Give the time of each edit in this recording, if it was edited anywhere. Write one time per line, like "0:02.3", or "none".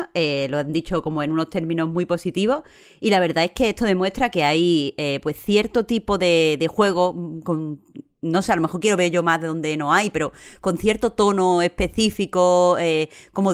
none